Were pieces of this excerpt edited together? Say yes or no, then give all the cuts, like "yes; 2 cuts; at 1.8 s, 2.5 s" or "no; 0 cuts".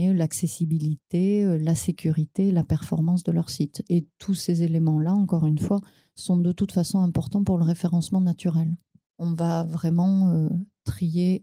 yes; 1 cut; at 9.0 s